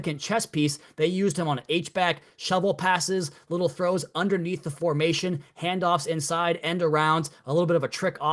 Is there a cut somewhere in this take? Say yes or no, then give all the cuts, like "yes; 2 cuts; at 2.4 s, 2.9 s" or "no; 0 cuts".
no; 0 cuts